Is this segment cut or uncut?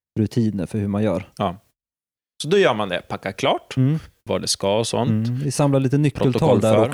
cut